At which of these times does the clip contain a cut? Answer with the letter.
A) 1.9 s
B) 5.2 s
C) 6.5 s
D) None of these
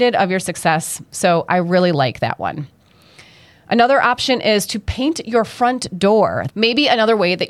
C